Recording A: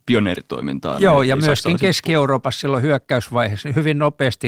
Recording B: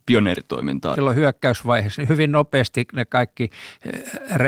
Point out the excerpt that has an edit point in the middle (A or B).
B